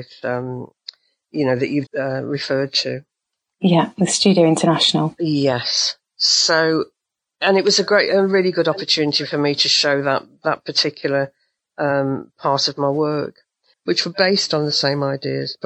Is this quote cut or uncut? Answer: cut